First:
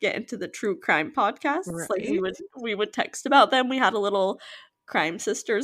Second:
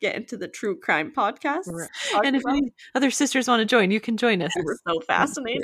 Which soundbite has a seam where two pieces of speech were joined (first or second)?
second